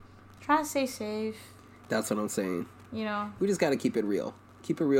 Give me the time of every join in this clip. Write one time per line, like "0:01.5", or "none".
none

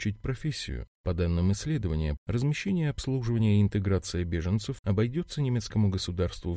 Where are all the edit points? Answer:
0:02.2
0:04.8

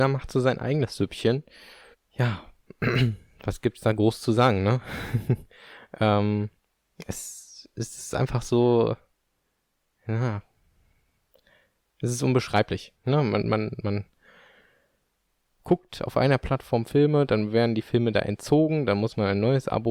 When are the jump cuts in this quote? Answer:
0:01.9

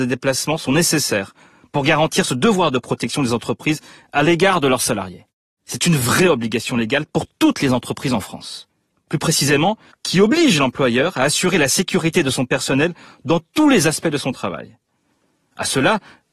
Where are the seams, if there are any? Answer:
0:05.5
0:09.9

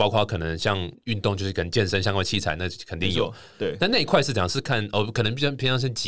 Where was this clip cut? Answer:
0:03.5

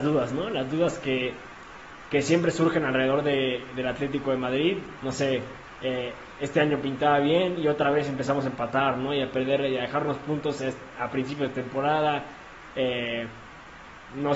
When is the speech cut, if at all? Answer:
0:04.9

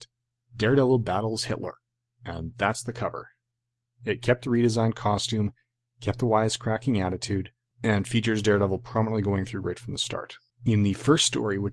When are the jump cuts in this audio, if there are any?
none

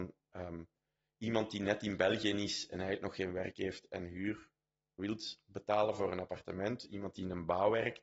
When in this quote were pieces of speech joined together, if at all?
0:05.0

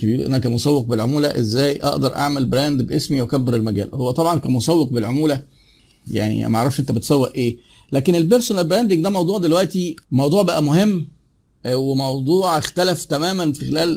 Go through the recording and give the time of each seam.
0:10.0

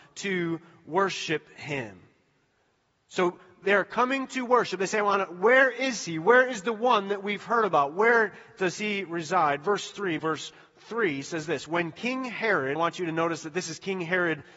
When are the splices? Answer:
0:10.2
0:12.8

